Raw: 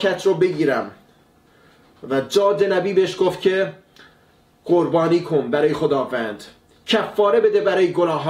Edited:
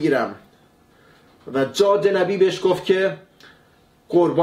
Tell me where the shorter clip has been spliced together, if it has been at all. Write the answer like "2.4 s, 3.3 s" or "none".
none